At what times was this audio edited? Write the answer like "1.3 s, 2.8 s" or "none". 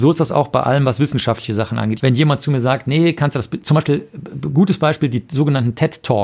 2.0 s